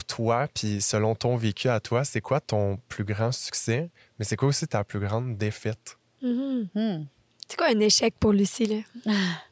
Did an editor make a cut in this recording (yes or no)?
no